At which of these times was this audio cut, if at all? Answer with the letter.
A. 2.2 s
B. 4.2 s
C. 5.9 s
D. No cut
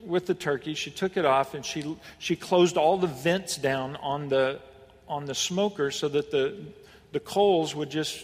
D